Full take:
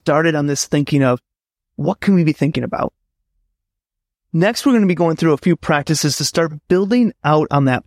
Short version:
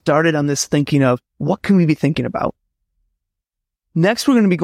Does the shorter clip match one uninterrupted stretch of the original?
no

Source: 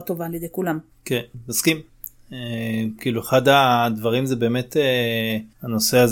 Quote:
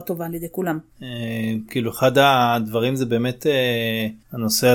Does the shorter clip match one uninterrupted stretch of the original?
no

